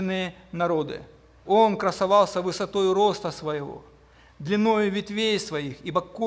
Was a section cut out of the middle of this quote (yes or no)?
yes